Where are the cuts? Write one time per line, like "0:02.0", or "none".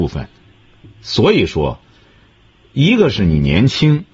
none